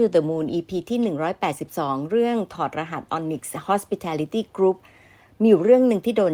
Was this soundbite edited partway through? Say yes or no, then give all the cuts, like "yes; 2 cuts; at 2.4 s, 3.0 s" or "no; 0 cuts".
no; 0 cuts